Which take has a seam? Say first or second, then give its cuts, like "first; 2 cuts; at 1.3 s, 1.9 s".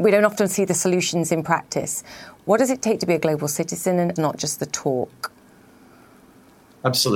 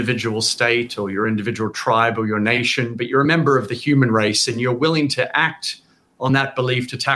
first; 1 cut; at 4.2 s